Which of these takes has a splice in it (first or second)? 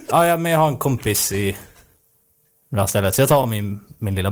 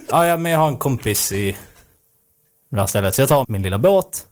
second